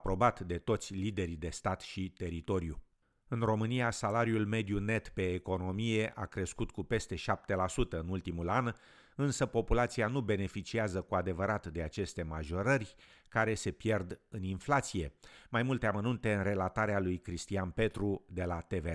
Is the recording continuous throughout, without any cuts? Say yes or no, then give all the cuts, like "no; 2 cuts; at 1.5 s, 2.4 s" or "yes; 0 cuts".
yes; 0 cuts